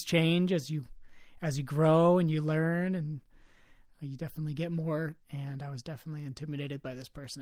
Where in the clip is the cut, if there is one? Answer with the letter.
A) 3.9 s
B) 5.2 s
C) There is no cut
B